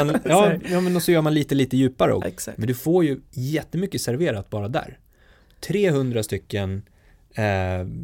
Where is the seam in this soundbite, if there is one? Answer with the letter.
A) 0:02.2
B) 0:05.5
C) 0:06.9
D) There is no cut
A